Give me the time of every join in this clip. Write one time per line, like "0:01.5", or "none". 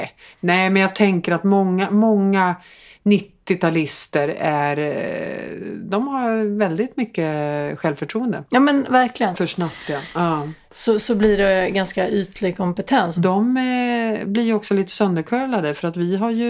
0:09.3
0:13.2